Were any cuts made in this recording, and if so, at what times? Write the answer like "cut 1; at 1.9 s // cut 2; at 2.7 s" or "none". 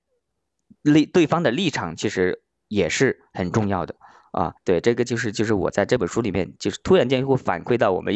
cut 1; at 4.6 s